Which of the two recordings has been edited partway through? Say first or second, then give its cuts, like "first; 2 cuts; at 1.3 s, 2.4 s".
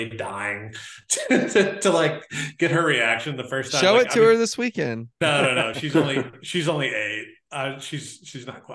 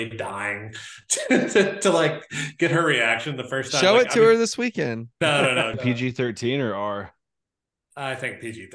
second; 1 cut; at 5.7 s